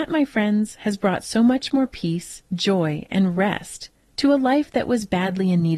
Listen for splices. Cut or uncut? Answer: uncut